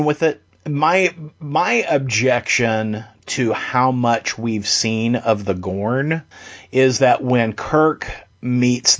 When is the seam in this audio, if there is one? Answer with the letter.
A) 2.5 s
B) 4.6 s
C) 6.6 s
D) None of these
D